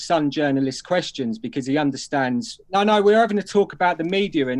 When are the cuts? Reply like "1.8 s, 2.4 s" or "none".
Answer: 2.6 s